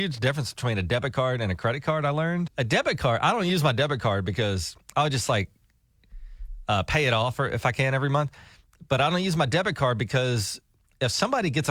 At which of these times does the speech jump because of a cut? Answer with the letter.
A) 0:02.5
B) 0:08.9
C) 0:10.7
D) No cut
A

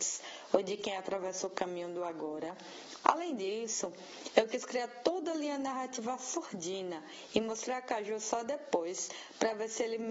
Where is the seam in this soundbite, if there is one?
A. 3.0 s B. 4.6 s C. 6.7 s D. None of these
A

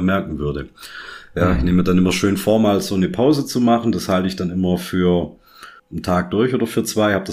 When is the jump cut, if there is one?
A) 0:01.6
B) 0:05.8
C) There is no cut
B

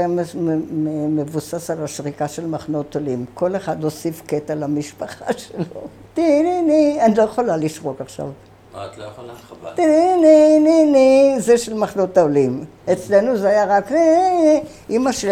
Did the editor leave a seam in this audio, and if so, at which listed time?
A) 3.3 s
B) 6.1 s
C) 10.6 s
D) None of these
B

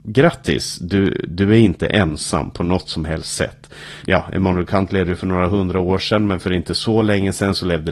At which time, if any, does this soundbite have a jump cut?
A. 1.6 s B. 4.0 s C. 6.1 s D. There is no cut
B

